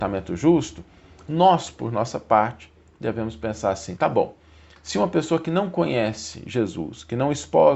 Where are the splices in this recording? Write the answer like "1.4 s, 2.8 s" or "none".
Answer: none